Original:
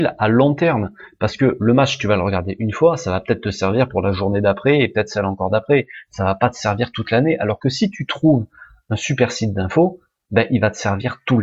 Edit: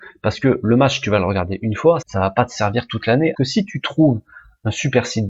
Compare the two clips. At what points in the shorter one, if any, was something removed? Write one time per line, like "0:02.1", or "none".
0:02.0
0:03.3